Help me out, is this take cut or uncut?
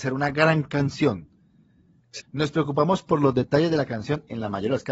cut